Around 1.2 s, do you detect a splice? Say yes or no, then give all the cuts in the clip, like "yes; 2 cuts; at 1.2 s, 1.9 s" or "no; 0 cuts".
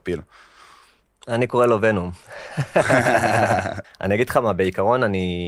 no; 1 cut; at 3.8 s